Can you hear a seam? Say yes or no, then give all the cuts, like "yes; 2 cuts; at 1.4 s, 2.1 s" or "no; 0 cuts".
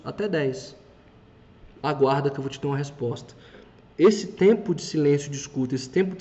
no; 0 cuts